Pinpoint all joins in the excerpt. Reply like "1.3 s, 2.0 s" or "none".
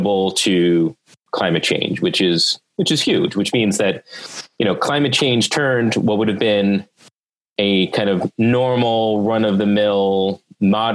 none

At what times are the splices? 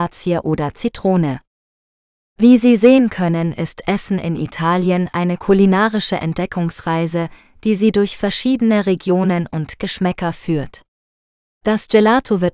11.5 s

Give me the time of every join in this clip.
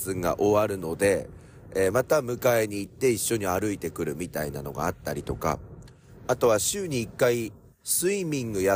none

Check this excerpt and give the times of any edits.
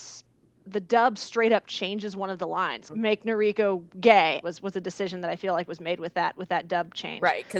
2.9 s, 4.4 s

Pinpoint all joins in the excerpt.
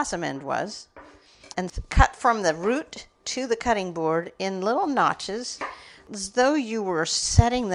1.5 s

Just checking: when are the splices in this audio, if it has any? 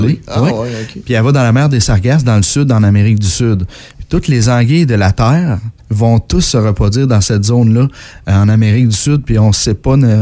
5.8 s

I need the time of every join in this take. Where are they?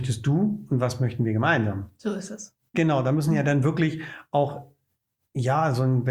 2.7 s

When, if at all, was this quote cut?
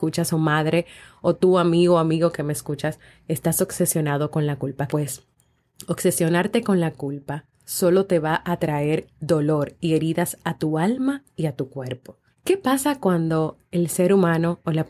4.9 s, 12.3 s

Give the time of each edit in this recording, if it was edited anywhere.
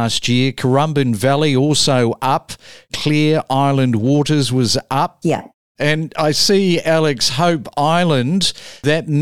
5.2 s

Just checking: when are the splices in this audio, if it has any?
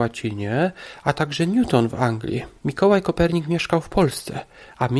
2.6 s

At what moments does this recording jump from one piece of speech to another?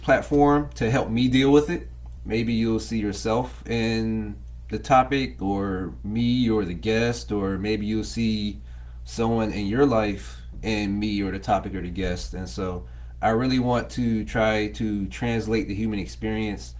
2.2 s

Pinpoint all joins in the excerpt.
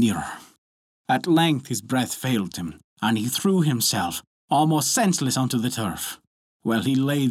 none

